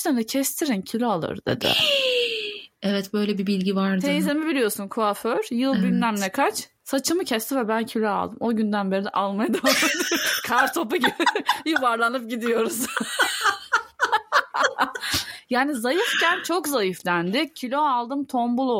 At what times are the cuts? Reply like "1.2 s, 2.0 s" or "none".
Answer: none